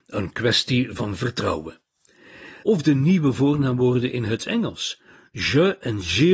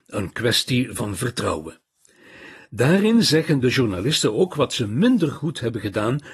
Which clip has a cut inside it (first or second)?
first